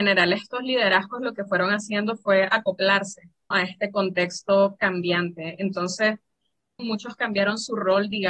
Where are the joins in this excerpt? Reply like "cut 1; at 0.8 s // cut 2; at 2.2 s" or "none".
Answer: cut 1; at 3.5 s // cut 2; at 6.8 s